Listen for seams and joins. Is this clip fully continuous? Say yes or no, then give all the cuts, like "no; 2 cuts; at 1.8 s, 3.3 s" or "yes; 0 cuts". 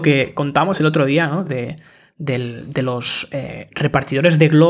yes; 0 cuts